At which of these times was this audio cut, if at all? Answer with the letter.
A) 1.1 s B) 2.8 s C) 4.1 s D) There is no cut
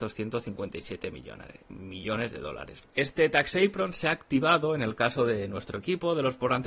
B